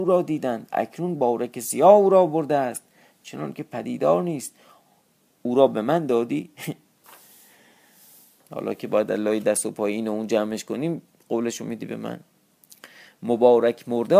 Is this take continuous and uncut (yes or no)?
yes